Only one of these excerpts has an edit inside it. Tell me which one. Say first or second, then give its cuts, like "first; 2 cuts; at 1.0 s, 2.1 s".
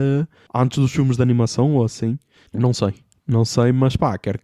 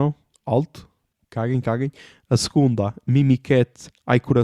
second; 1 cut; at 2.2 s